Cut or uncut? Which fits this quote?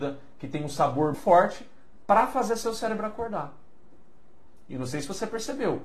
cut